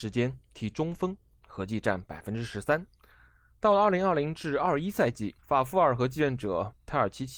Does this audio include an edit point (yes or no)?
yes